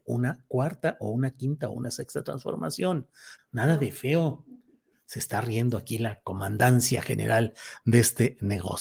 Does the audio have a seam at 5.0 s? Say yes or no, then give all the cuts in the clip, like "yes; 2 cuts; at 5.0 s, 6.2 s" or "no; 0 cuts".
no; 1 cut; at 3.4 s